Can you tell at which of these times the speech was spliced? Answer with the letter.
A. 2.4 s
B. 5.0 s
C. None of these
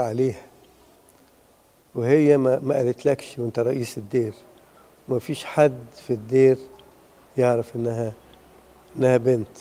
C